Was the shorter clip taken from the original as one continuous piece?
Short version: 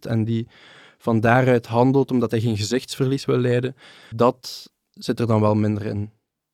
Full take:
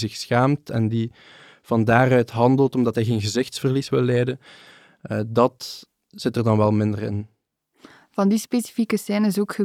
no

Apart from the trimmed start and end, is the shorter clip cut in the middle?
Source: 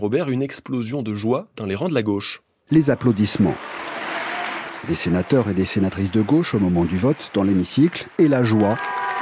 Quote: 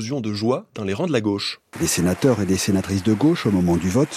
yes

